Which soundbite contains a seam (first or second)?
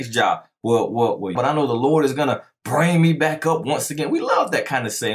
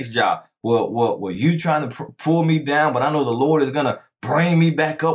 first